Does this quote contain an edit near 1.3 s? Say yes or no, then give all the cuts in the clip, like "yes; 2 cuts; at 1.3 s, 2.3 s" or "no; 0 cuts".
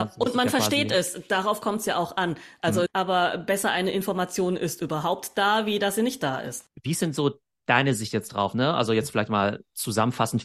no; 1 cut; at 2.9 s